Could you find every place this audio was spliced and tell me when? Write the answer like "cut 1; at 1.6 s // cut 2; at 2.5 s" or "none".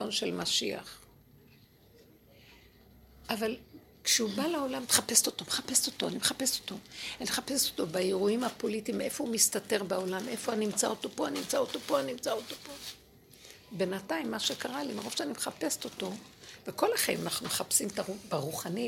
none

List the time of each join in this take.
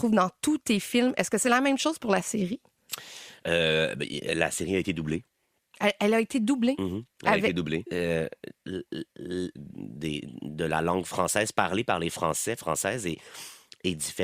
cut 1; at 7.9 s // cut 2; at 9.6 s // cut 3; at 13.1 s

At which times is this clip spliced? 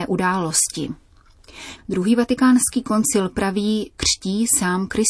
cut 1; at 1.8 s // cut 2; at 3.9 s

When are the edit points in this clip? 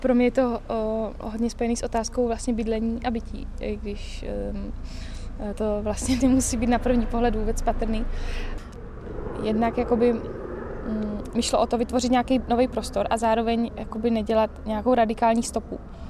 none

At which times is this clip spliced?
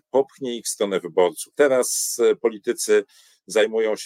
cut 1; at 1.5 s

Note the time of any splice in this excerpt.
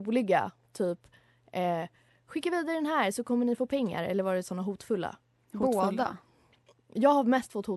none

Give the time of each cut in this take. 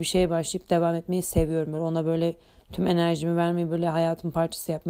none

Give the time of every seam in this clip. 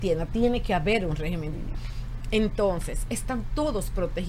cut 1; at 1.5 s

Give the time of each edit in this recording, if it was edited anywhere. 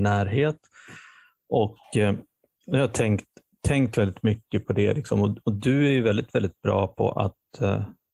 none

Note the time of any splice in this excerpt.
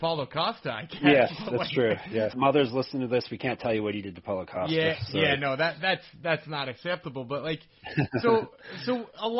cut 1; at 2.3 s

